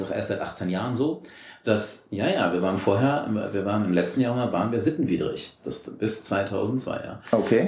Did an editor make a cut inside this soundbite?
yes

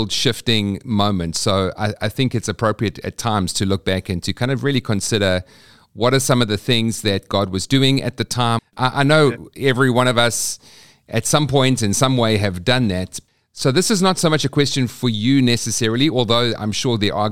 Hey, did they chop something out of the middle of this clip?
yes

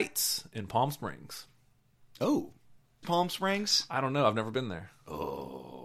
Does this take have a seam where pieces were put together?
yes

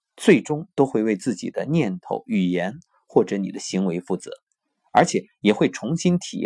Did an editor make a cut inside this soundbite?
no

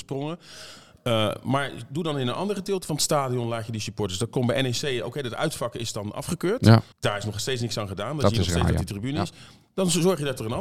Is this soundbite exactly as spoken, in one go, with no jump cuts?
no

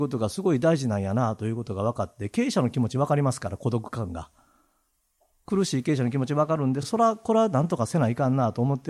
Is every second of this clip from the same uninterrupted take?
yes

